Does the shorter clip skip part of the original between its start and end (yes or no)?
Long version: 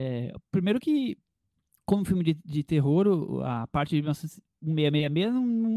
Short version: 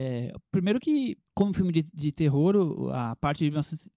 yes